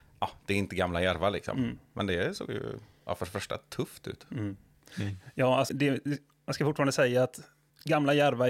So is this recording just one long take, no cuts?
no; 1 cut; at 5.7 s

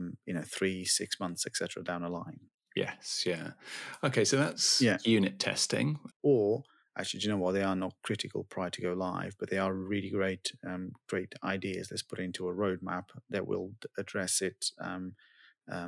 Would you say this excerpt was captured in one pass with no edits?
no; 1 cut; at 6.1 s

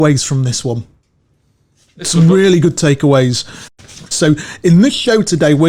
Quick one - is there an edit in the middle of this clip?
yes; 1 cut; at 4.1 s

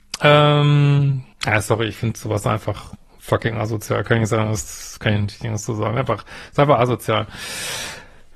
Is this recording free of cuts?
no; 1 cut; at 1.3 s

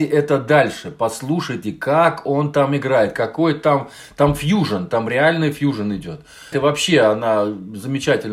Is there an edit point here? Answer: yes; 1 cut; at 6.5 s

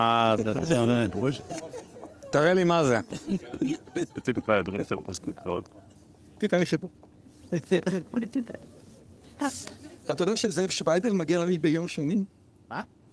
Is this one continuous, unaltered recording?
yes; 0 cuts

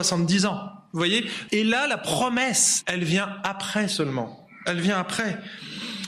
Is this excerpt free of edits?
no; 2 cuts; at 1.5 s, 2.8 s

